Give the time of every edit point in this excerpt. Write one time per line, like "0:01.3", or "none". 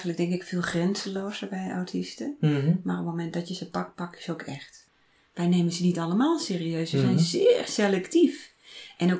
0:04.9